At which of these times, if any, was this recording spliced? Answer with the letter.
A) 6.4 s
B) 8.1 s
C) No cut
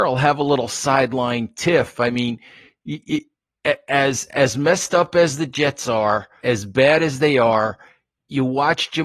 A